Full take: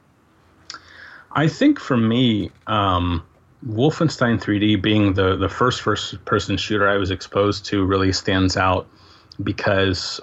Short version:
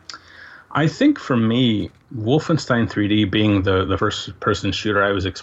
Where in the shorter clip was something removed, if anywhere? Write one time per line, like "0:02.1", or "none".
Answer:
0:02.0
0:04.0